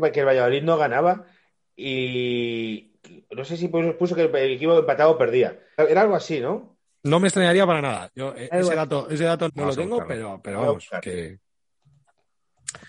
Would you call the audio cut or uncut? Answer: cut